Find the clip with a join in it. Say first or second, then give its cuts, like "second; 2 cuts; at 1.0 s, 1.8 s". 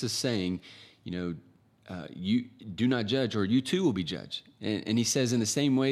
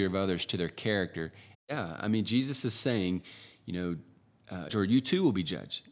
second; 2 cuts; at 1.5 s, 4.7 s